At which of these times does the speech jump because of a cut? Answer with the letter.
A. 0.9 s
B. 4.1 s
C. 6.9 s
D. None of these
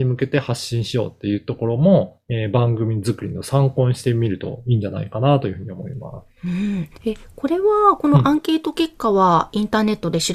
C